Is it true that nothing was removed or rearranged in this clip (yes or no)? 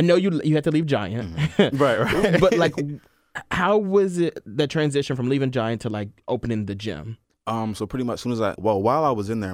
no